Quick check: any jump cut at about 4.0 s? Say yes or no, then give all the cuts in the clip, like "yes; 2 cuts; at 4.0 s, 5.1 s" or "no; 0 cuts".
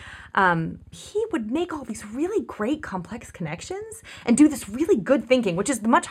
no; 1 cut; at 0.9 s